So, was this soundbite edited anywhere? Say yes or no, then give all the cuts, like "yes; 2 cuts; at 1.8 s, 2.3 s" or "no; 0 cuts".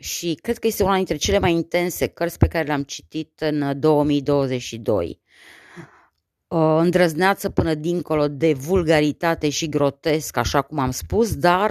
no; 0 cuts